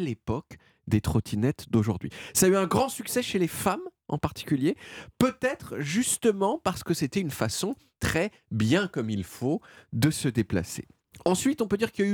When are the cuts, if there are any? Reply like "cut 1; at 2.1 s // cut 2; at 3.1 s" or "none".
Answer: none